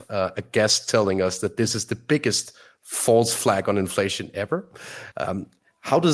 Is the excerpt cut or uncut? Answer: cut